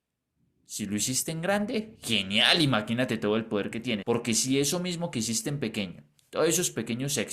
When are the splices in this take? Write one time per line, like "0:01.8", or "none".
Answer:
0:04.0

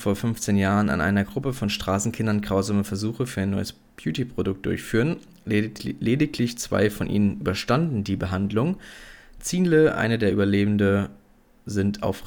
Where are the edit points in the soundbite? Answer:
none

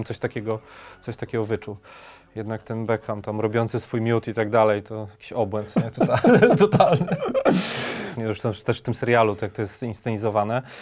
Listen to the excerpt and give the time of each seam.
0:08.2

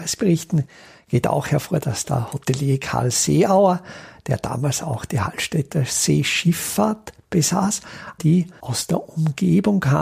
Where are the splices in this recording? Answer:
0:08.2

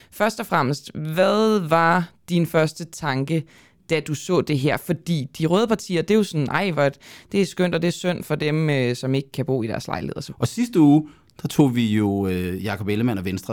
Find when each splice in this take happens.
0:10.3

